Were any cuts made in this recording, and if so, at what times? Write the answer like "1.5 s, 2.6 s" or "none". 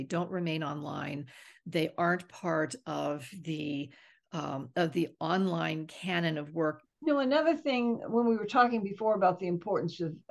6.8 s

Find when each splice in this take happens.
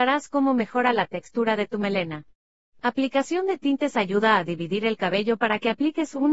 none

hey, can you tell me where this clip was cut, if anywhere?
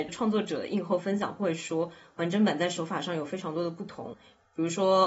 none

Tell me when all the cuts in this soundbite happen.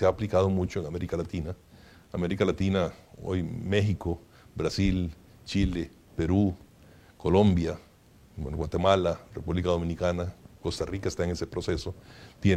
none

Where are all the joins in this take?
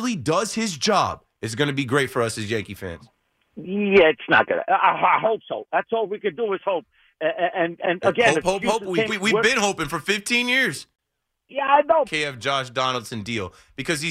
9.1 s, 12.0 s

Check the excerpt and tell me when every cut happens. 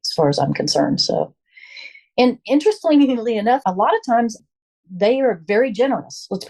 3.6 s

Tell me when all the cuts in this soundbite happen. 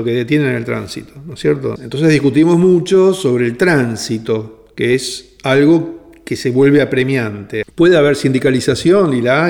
1.8 s, 7.6 s

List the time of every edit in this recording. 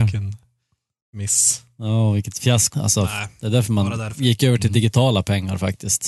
2.7 s

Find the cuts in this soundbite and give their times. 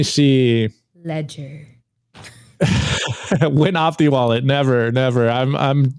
none

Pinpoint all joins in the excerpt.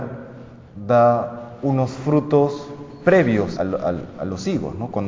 3.6 s

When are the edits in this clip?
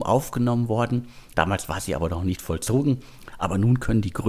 1.3 s, 3.3 s

